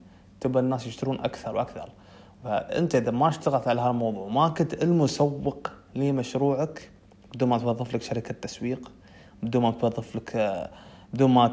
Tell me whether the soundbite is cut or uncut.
cut